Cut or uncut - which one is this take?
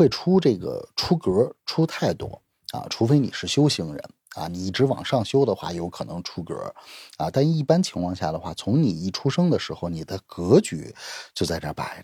uncut